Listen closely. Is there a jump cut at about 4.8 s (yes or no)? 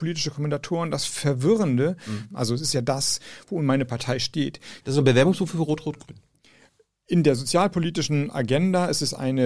yes